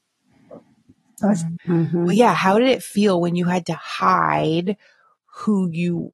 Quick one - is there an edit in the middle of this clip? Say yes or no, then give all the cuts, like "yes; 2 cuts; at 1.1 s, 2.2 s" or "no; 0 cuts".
yes; 1 cut; at 1.6 s